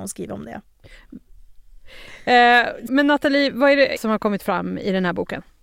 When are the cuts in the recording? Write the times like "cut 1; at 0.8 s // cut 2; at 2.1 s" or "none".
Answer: cut 1; at 1.3 s // cut 2; at 2.9 s // cut 3; at 4.0 s